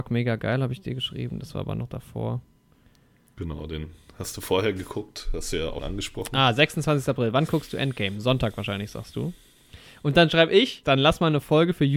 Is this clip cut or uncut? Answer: cut